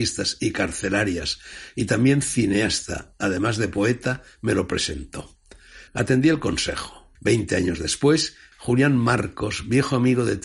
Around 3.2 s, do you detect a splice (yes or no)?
no